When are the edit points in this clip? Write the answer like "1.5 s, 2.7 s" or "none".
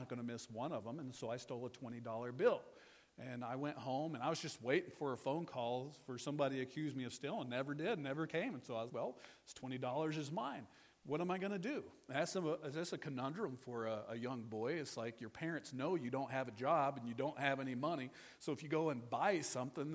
8.9 s